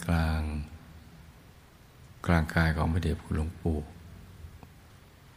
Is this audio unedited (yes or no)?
no